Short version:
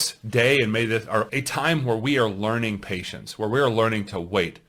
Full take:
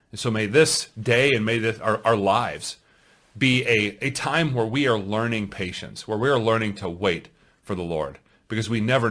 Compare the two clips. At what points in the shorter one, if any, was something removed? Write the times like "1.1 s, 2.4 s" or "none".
1.3 s